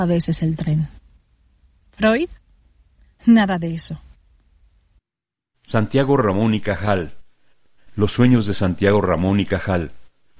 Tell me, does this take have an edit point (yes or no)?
no